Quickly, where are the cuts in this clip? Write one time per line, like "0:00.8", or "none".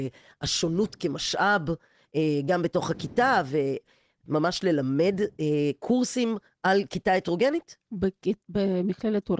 0:04.3